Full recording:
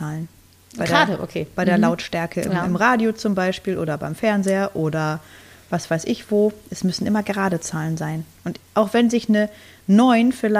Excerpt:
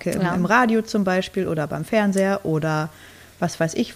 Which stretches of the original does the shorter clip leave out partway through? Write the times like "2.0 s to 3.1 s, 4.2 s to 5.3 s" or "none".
none